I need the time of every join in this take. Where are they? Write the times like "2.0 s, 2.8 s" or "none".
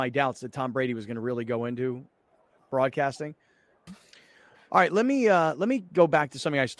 3.9 s

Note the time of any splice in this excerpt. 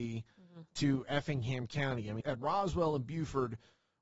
2.2 s

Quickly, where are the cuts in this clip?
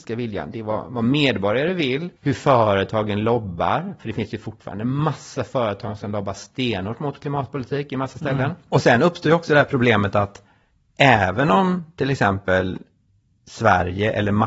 2.2 s

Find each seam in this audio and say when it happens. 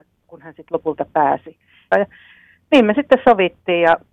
1.9 s

